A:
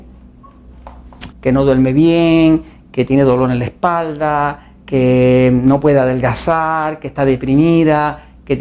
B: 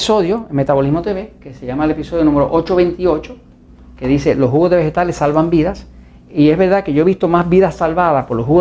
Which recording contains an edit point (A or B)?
A